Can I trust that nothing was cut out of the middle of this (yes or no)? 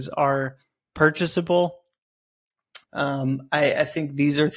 no